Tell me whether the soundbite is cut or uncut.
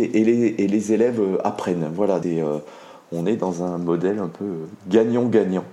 cut